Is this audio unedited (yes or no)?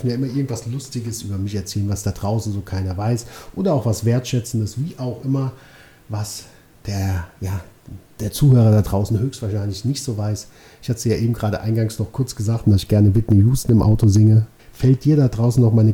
no